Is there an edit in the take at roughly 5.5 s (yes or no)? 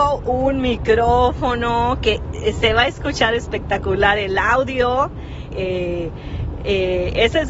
yes